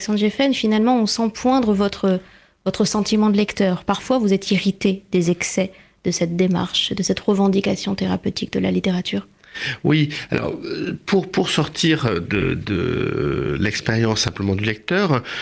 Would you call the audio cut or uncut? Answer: uncut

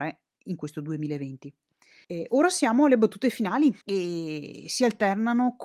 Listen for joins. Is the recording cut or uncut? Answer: cut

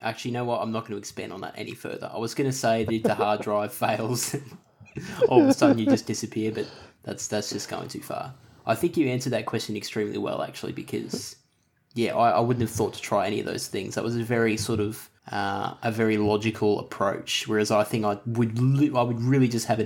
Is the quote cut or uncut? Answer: cut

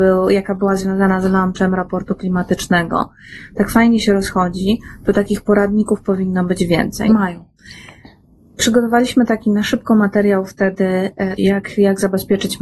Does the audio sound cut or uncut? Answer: cut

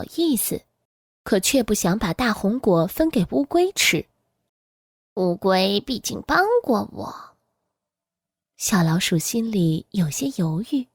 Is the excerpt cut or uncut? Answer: uncut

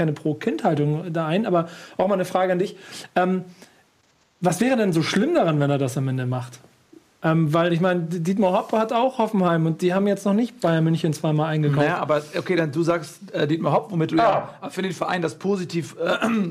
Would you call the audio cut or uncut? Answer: uncut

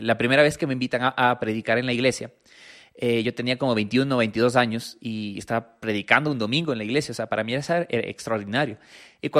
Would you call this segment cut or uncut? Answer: uncut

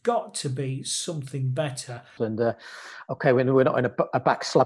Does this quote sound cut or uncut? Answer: cut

